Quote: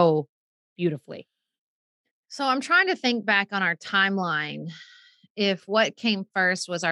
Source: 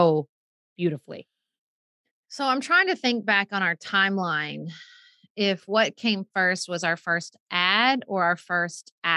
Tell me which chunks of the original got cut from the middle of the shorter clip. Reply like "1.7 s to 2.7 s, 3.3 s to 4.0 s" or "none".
none